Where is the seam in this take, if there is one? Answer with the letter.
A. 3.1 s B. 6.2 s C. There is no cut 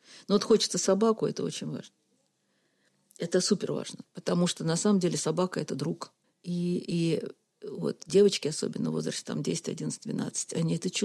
B